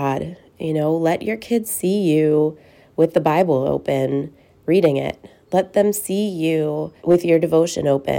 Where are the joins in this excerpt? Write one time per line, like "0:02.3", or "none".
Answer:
0:07.0

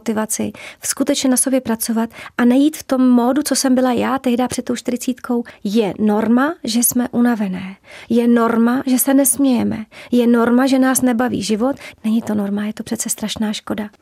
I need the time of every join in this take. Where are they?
0:11.9

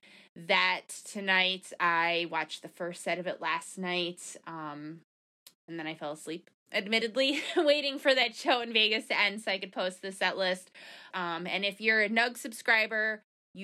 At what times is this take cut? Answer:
0:01.8
0:11.1

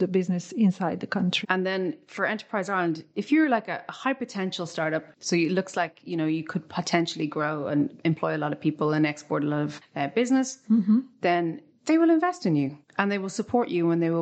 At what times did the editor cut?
0:01.4

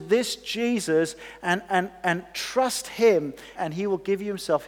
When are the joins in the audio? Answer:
0:03.5

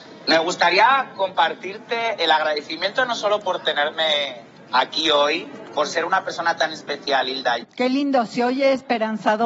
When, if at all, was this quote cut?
0:05.7
0:07.6

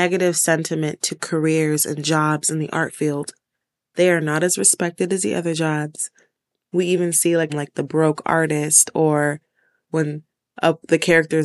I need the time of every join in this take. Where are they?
0:07.5

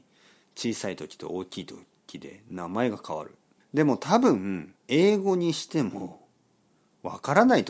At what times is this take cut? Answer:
0:03.6
0:04.8

